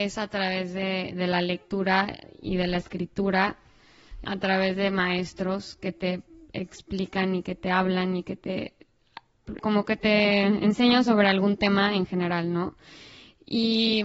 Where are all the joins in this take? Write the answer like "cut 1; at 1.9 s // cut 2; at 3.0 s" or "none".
cut 1; at 4.2 s // cut 2; at 9.6 s